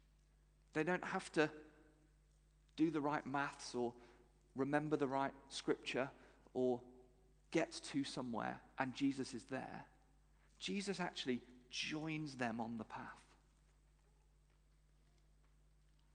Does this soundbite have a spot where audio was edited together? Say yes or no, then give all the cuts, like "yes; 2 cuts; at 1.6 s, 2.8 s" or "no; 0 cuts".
no; 0 cuts